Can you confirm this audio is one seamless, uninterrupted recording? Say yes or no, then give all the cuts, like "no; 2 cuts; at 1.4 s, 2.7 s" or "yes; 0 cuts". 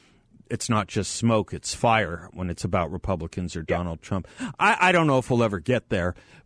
yes; 0 cuts